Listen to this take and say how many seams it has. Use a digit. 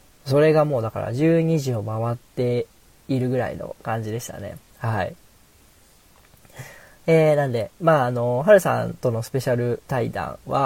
0